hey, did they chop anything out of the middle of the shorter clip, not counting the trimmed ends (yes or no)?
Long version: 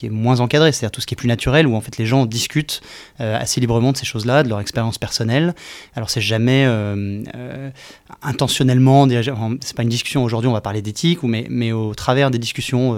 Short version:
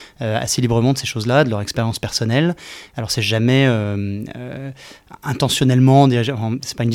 no